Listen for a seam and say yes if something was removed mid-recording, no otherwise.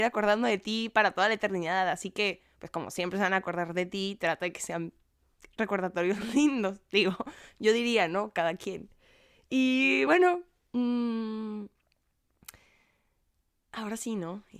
no